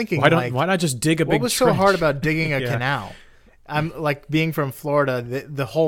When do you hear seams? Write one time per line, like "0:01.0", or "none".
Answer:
none